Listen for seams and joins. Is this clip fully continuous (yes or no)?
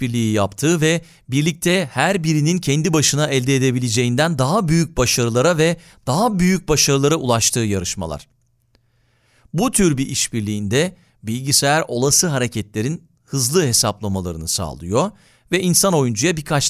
yes